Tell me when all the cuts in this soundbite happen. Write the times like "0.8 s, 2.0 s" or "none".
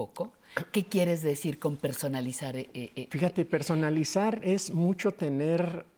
none